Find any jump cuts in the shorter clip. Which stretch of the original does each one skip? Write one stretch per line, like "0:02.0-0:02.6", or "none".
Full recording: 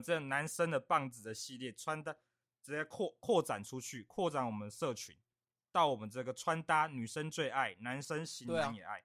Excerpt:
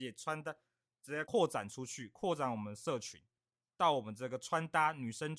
0:02.8-0:03.2